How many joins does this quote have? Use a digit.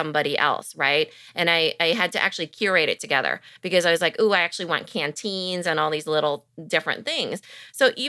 0